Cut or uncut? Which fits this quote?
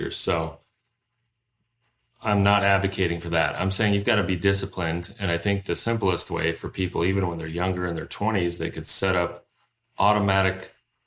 uncut